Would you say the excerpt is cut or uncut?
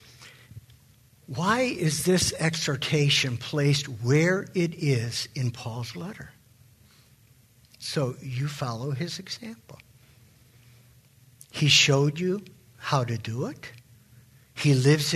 cut